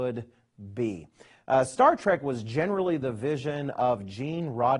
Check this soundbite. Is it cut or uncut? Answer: uncut